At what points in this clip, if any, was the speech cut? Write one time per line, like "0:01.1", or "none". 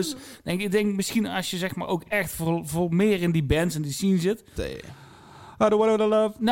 0:04.6